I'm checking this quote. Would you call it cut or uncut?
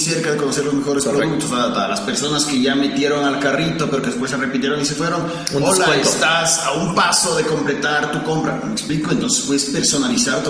uncut